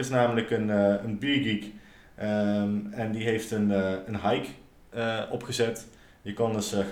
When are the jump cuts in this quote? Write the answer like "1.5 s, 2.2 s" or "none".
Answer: none